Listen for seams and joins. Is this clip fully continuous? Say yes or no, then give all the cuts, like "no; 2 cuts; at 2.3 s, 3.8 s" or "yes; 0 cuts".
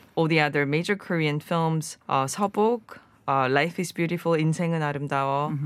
no; 1 cut; at 2.0 s